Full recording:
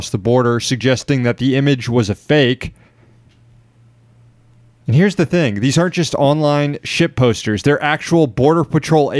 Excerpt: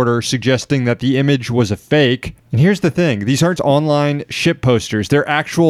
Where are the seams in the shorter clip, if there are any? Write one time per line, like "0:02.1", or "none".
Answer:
0:02.4
0:03.6